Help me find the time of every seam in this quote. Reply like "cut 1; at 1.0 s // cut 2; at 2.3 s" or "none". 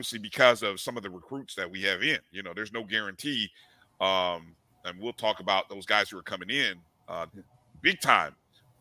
cut 1; at 7.3 s

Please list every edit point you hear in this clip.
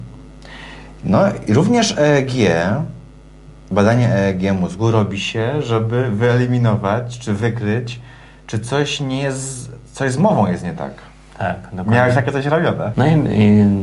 cut 1; at 12.9 s

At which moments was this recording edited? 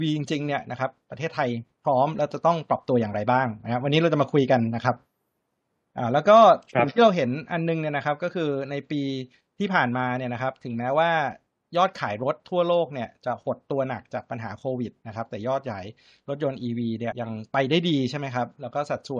cut 1; at 17.1 s

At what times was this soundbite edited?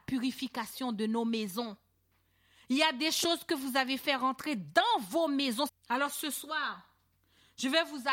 cut 1; at 5.7 s

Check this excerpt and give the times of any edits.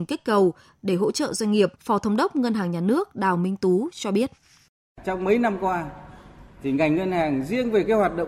cut 1; at 1.8 s

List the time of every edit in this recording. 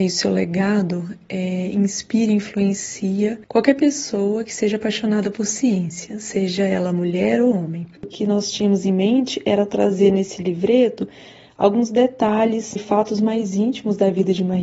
cut 1; at 8.0 s // cut 2; at 12.8 s

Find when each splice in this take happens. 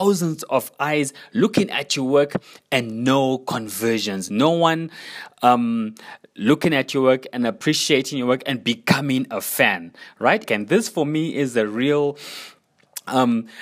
cut 1; at 4.3 s // cut 2; at 10.4 s

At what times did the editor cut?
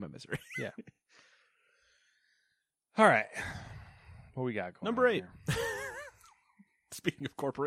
none

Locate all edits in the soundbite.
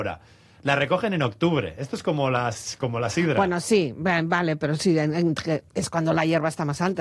none

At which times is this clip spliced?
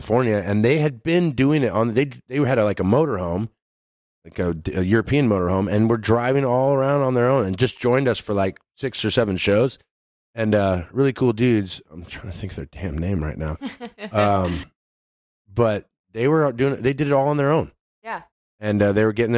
none

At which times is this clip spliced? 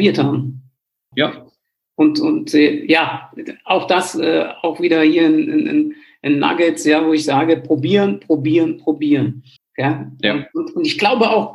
cut 1; at 1.1 s // cut 2; at 9.6 s

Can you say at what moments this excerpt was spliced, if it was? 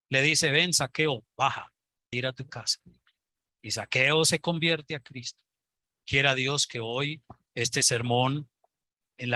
cut 1; at 2.1 s

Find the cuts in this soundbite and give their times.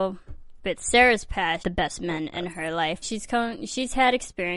cut 1; at 1.6 s // cut 2; at 3.0 s

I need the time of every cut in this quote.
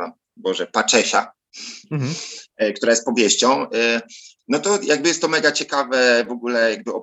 cut 1; at 4.4 s

